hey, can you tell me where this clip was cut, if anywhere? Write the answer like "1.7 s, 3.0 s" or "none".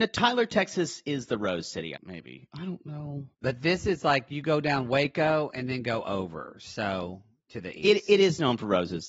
2.0 s, 3.3 s